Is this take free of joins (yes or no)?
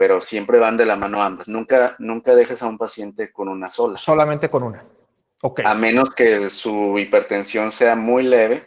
yes